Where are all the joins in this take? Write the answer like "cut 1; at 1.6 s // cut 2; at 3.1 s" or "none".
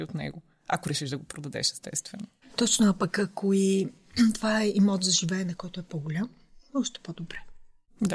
none